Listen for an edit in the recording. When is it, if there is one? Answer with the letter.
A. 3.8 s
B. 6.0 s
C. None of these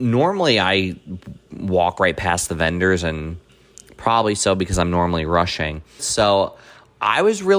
B